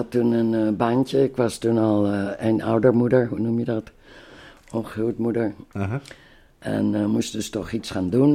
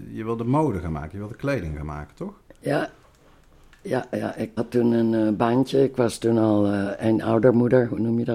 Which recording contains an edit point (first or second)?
second